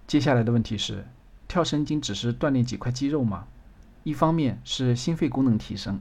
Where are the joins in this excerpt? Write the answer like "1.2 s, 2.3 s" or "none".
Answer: 1.9 s, 4.0 s